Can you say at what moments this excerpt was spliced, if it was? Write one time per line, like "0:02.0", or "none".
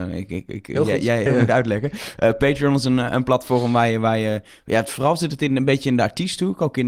0:01.3

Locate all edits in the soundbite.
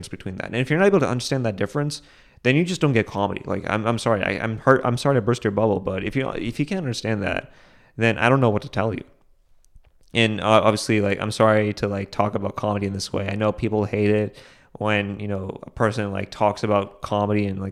none

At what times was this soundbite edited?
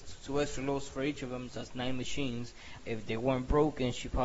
0:01.5
0:02.8

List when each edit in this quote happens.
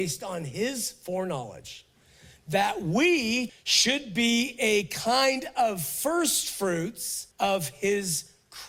0:03.5
0:07.3

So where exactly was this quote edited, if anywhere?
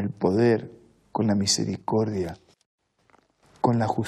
0:01.0

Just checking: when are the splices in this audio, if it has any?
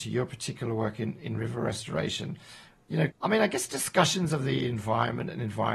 0:03.1

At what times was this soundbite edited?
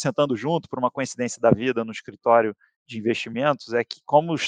none

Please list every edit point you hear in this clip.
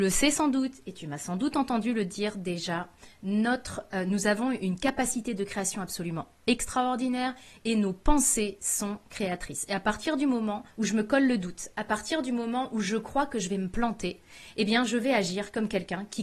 0:10.7

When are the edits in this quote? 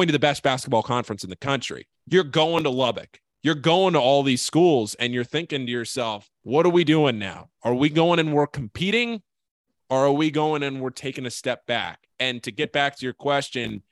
0:01.9
0:06.4

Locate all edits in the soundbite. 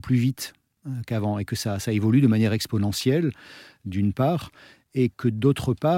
none

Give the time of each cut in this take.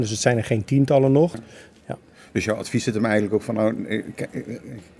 0:01.3

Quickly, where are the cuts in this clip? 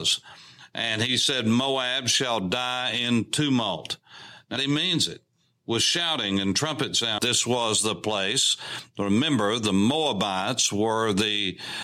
0:04.6
0:07.2

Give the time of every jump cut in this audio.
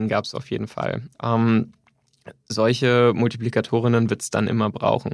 0:01.1

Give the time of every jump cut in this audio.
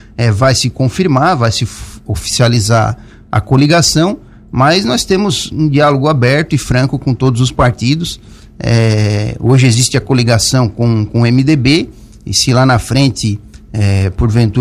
none

